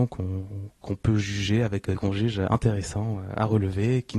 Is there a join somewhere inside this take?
yes; 1 cut; at 1.9 s

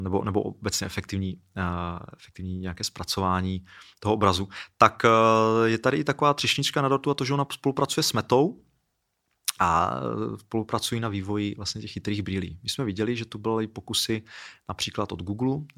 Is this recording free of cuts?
yes; 0 cuts

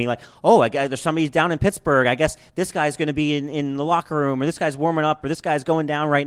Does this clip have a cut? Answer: no; 0 cuts

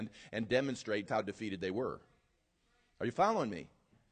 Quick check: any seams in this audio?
yes; 1 cut; at 1.1 s

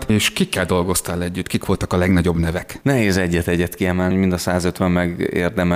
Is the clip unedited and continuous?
no; 1 cut; at 4.1 s

